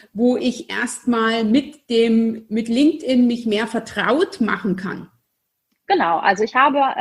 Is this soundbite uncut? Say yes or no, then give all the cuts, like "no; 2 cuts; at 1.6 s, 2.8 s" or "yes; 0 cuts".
yes; 0 cuts